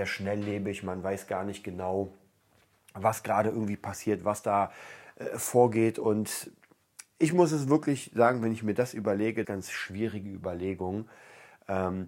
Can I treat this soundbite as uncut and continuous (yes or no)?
no